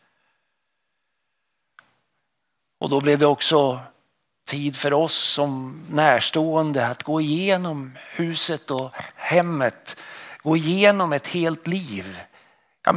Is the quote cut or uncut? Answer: uncut